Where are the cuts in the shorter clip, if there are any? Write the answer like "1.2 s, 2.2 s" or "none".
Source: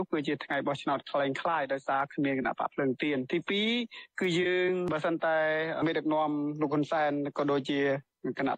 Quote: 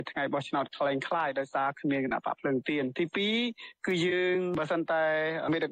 none